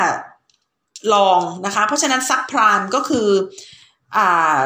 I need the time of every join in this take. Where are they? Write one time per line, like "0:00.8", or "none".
none